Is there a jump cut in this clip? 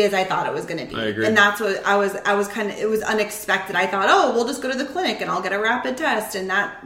no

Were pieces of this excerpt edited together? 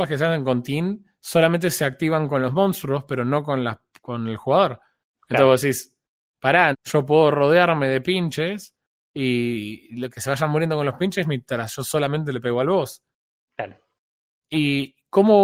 yes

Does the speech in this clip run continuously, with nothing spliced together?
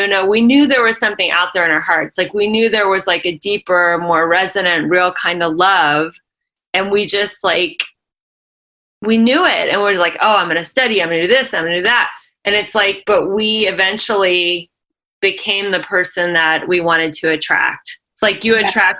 yes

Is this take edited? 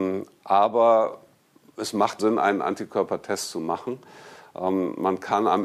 yes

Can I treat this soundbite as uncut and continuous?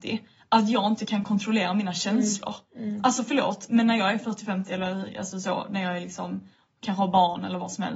yes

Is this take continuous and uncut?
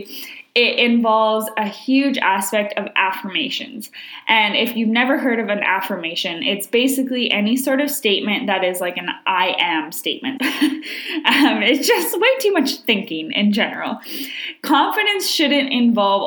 no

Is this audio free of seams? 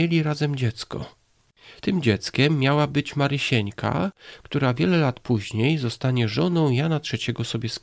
yes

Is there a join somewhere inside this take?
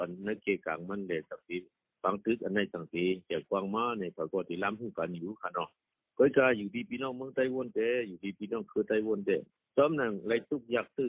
no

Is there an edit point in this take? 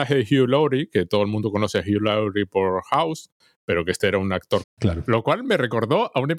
yes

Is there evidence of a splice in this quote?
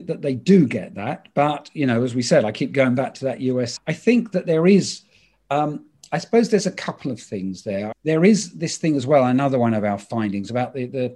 yes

